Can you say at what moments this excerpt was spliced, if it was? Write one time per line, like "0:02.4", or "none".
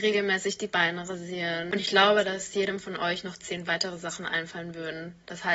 none